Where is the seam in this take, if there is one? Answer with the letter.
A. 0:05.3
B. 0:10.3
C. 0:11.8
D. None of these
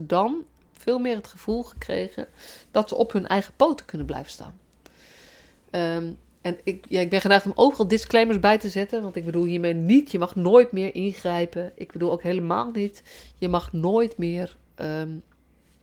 D